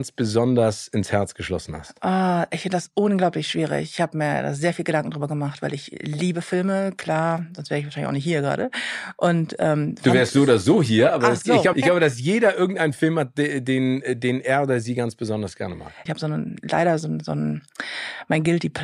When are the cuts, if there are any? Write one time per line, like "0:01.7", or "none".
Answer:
0:11.7
0:16.1